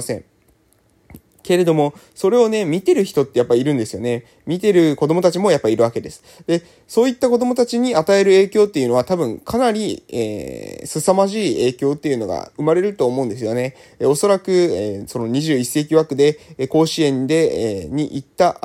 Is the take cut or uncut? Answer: uncut